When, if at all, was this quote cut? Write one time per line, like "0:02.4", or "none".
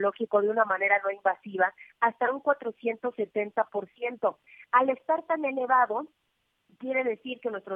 none